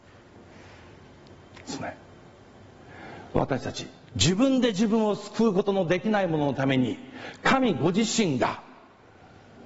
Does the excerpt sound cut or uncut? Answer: uncut